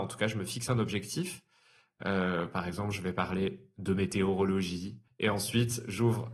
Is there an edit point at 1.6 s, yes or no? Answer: no